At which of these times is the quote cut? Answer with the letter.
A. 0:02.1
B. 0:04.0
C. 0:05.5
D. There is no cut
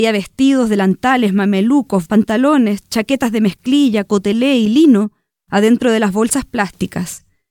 A